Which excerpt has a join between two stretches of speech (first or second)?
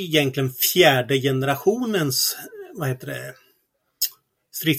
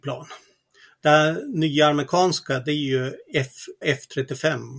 second